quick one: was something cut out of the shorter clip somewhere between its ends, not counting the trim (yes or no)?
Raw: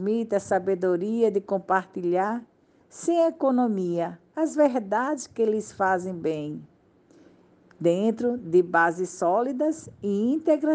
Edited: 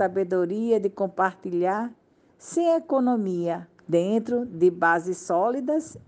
yes